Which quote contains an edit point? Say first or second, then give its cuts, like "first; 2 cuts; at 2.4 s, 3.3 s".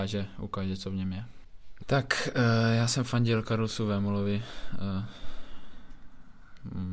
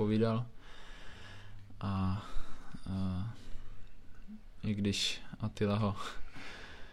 first; 1 cut; at 1.8 s